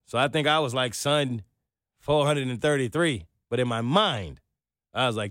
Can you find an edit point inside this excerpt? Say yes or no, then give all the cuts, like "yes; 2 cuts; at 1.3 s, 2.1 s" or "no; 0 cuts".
no; 0 cuts